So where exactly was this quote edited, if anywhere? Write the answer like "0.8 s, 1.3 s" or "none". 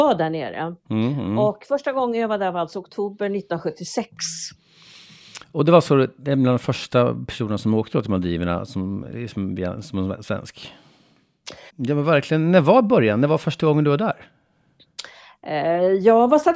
11.7 s